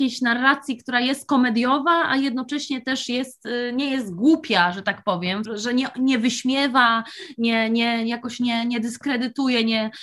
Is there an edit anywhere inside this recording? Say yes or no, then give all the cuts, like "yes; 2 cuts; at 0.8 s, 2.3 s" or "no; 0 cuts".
yes; 1 cut; at 5.5 s